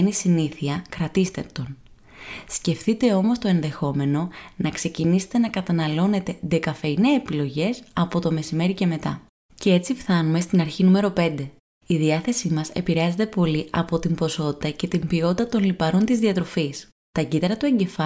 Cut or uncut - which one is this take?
uncut